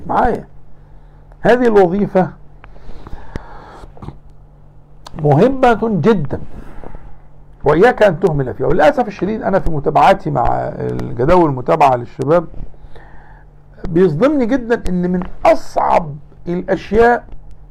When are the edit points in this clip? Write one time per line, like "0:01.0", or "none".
none